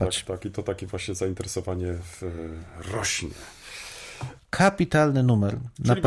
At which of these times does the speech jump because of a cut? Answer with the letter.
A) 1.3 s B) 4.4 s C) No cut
B